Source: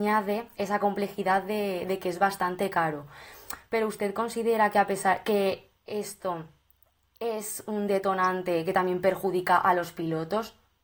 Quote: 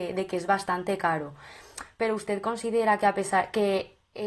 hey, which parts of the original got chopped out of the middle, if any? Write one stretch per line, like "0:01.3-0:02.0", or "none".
none